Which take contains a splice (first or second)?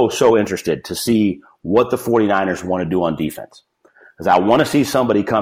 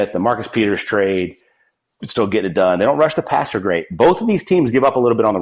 second